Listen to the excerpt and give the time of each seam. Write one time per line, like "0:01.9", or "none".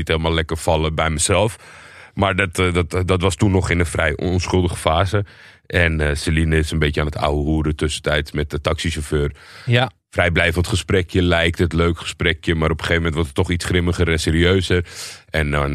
none